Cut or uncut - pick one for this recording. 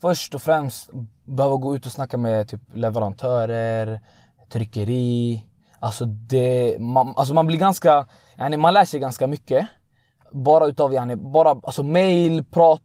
uncut